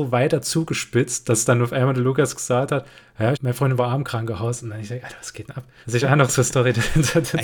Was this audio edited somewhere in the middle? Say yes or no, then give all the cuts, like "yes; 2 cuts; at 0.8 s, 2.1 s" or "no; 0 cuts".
yes; 2 cuts; at 3.3 s, 5.8 s